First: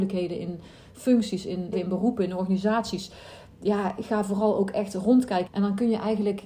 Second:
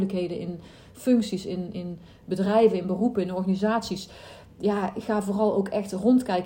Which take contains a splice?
first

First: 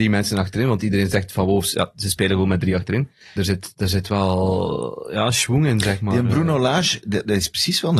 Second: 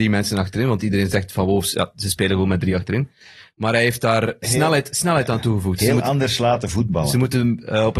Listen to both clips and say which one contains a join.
first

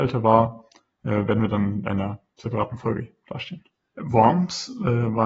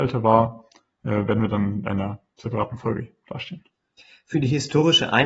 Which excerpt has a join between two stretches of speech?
first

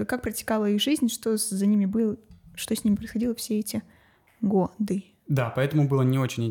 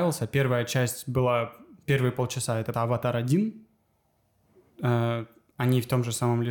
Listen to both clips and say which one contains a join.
second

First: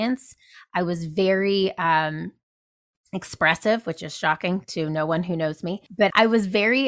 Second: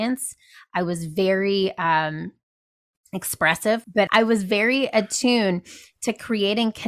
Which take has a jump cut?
second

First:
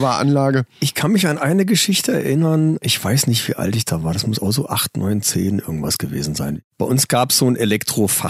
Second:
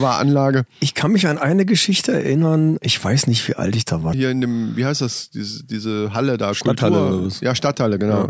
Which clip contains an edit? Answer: second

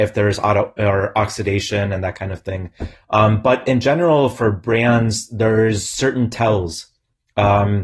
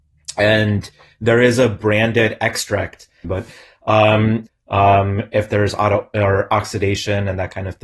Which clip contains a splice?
second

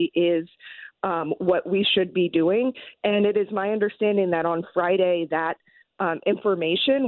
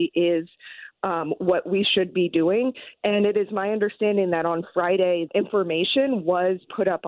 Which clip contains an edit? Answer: second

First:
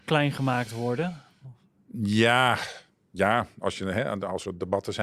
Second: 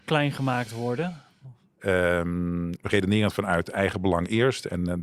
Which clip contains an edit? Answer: second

